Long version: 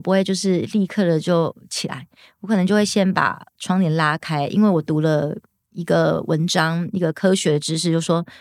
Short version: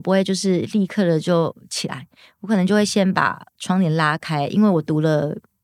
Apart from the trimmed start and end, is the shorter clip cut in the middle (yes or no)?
no